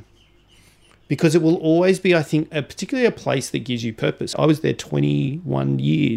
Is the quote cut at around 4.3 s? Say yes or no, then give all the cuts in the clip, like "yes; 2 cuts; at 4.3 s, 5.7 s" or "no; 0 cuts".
yes; 1 cut; at 4.3 s